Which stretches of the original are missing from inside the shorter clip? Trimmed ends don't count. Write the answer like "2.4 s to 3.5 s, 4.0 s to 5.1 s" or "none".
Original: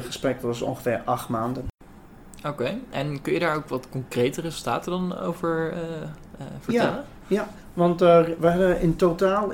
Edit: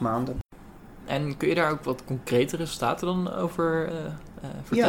2.3 s to 2.9 s, 5.7 s to 5.9 s